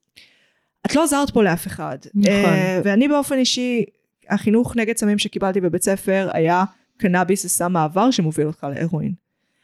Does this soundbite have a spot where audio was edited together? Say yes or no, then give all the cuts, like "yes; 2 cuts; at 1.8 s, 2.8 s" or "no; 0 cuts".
yes; 1 cut; at 2.8 s